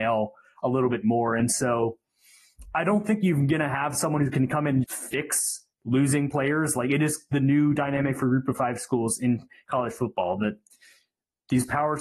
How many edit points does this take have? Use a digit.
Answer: 2